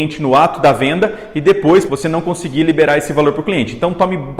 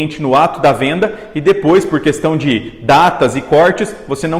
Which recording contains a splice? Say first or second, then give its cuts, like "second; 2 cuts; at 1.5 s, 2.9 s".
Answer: first; 1 cut; at 1.9 s